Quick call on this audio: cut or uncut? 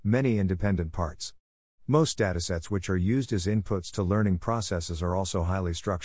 uncut